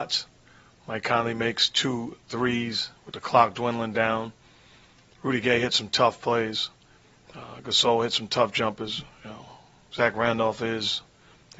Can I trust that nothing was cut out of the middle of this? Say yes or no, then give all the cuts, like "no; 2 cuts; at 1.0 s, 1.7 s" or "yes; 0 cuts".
yes; 0 cuts